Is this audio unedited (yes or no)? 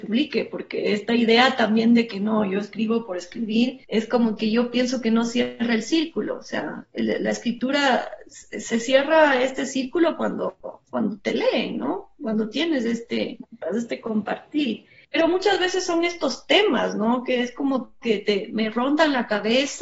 no